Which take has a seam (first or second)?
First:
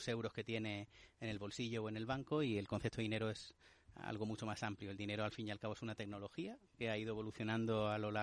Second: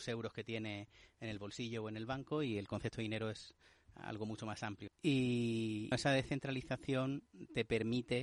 second